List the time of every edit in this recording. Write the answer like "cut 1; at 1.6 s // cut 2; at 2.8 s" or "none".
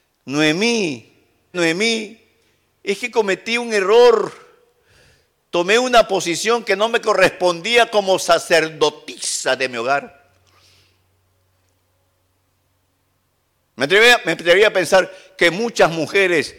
cut 1; at 1.5 s

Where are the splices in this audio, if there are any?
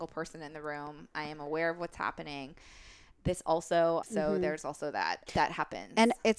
cut 1; at 4.0 s // cut 2; at 5.3 s

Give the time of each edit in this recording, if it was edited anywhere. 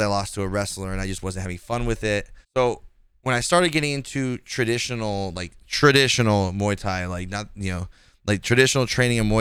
cut 1; at 2.4 s

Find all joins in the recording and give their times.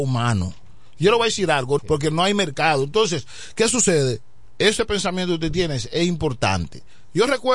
cut 1; at 1.8 s

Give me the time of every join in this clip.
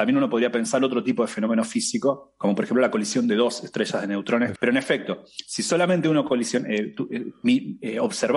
cut 1; at 4.6 s

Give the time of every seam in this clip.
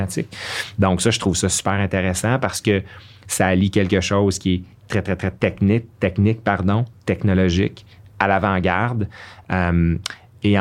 cut 1; at 5.9 s

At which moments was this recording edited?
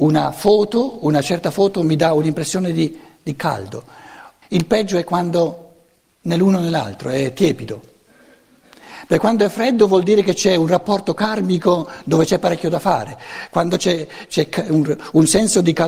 cut 1; at 4.4 s

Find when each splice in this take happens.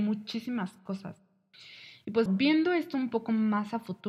cut 1; at 2.3 s

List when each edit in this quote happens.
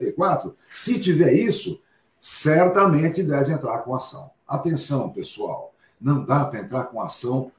none

